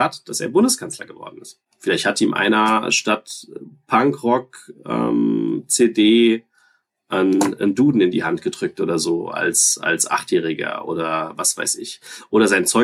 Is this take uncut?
yes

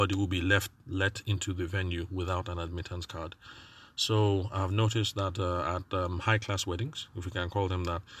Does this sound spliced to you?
no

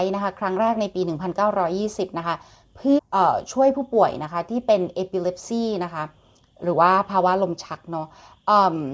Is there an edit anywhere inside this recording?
yes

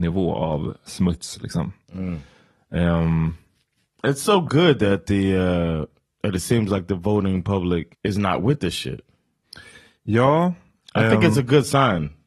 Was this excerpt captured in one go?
no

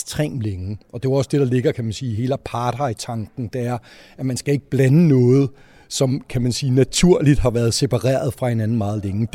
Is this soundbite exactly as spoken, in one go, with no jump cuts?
yes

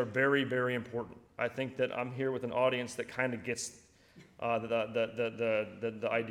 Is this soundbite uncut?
yes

